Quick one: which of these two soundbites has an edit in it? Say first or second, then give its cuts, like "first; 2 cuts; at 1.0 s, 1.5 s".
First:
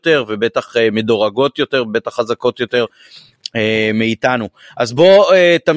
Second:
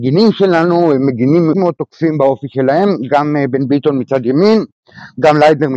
second; 1 cut; at 1.5 s